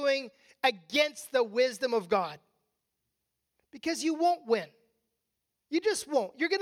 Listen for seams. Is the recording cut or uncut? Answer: uncut